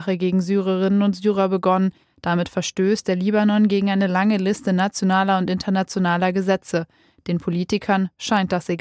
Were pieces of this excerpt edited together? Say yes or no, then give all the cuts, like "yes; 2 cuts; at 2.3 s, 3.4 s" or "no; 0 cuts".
yes; 1 cut; at 2.0 s